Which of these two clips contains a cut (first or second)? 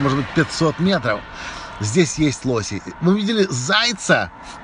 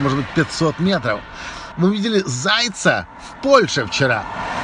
second